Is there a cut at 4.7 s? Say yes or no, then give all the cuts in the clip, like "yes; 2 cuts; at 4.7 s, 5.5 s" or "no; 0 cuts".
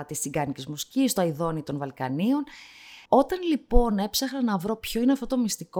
no; 1 cut; at 3.1 s